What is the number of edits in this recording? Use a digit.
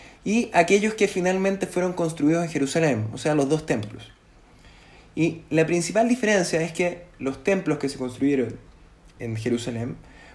1